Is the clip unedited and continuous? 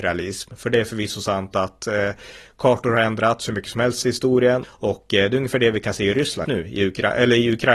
no; 2 cuts; at 4.6 s, 6.4 s

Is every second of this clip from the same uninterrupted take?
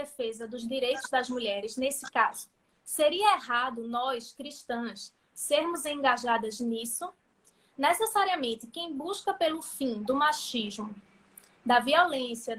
yes; 0 cuts

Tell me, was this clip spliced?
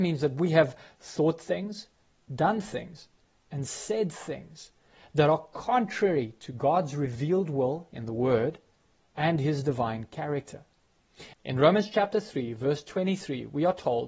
yes; 1 cut; at 11.3 s

